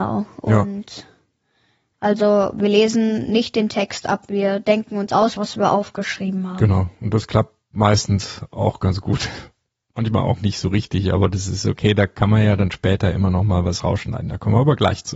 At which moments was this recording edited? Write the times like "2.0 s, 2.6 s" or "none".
5.4 s

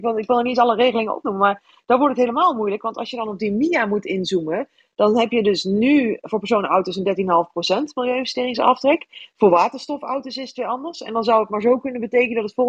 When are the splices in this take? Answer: none

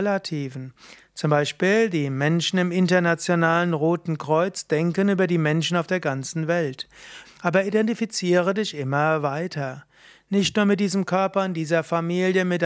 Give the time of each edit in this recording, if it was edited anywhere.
7.2 s

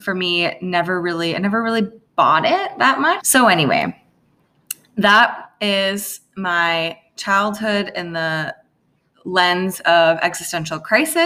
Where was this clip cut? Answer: 3.2 s

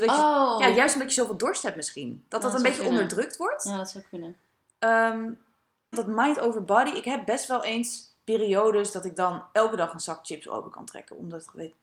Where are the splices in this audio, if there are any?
5.9 s

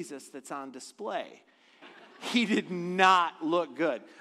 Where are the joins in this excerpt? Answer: 1.8 s

